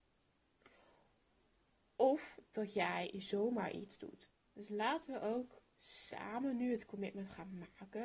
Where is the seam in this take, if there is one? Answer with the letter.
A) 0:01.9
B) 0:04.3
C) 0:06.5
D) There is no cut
B